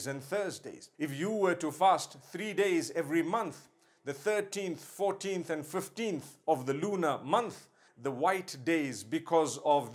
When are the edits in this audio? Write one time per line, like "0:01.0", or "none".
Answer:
0:00.9
0:07.9